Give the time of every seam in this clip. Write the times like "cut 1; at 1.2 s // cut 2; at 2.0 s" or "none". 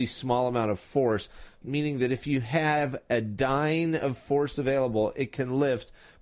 cut 1; at 1.6 s